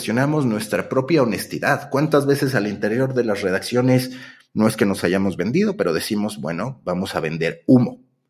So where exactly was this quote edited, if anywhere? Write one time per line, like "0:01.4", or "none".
none